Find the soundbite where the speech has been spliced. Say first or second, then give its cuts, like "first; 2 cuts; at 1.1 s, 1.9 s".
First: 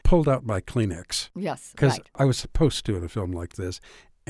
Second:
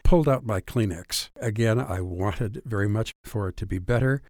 second; 1 cut; at 1.3 s